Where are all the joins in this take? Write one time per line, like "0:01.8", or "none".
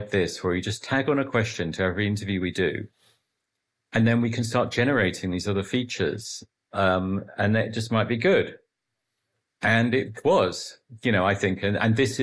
none